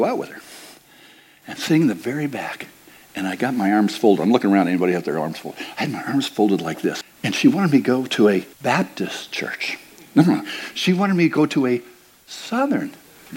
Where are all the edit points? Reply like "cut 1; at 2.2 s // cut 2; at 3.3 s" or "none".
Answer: cut 1; at 7.0 s // cut 2; at 8.5 s